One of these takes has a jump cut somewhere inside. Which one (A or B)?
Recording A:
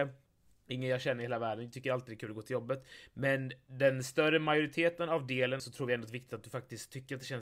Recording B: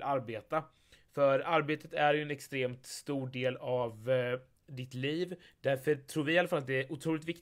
A